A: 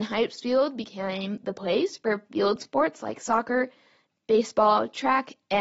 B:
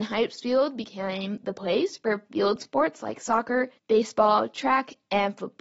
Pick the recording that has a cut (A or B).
B